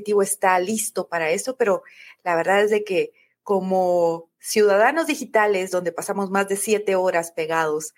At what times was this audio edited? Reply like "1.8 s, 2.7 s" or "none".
none

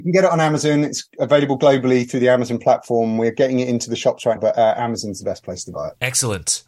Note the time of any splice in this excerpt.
4.4 s

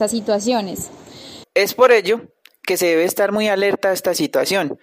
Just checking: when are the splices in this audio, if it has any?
1.4 s

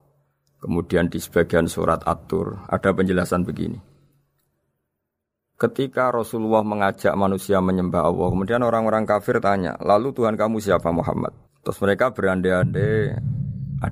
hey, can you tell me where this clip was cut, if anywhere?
11.4 s

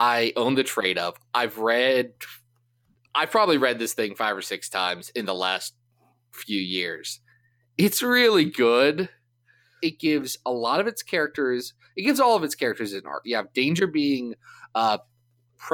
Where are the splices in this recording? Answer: 9.8 s, 13.2 s

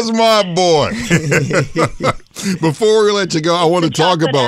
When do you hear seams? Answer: none

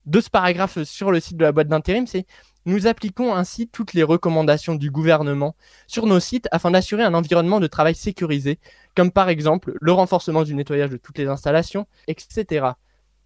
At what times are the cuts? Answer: 12.0 s

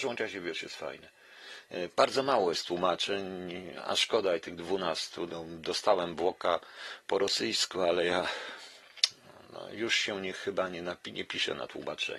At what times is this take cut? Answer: 1.9 s

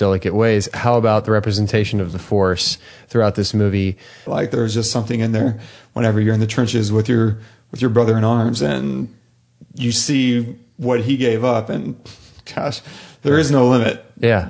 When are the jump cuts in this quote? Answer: 4.3 s

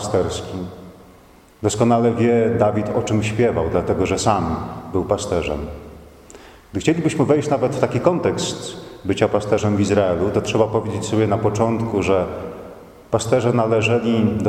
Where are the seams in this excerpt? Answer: none

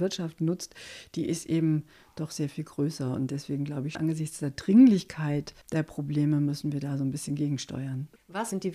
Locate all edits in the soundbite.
3.9 s, 5.6 s

